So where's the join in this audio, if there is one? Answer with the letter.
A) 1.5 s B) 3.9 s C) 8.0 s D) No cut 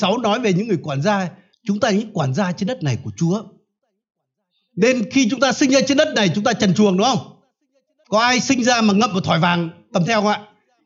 A